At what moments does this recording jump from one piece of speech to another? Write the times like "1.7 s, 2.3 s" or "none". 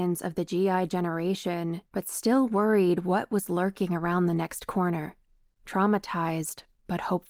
1.9 s